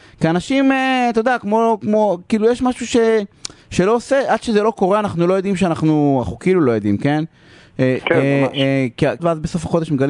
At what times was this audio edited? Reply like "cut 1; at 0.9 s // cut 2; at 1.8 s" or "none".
cut 1; at 8.0 s // cut 2; at 9.2 s